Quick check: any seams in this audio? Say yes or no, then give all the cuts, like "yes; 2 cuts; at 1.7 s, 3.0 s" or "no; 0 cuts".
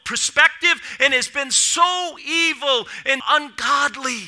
yes; 1 cut; at 3.2 s